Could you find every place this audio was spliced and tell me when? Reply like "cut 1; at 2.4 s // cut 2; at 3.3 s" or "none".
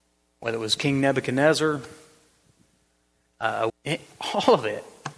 cut 1; at 3.7 s